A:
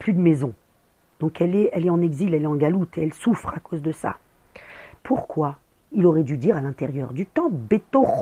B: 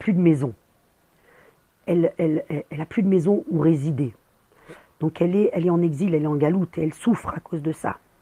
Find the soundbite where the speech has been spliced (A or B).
A